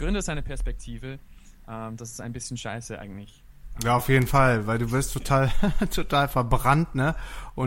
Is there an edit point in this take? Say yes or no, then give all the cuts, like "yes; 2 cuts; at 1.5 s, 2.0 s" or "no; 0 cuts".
no; 0 cuts